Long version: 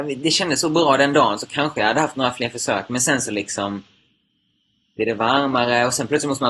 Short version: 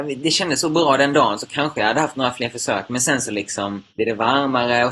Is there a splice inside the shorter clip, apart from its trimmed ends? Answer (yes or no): yes